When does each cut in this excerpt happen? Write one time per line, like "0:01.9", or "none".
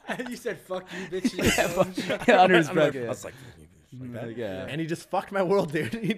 0:02.9
0:04.7